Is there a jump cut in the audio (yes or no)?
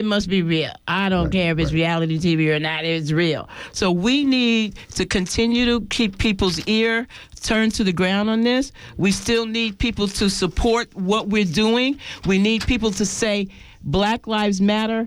no